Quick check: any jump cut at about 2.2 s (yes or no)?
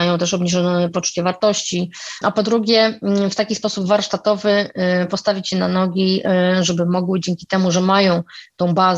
yes